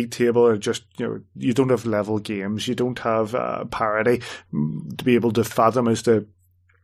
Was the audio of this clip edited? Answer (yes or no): no